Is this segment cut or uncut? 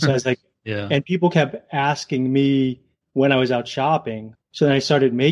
cut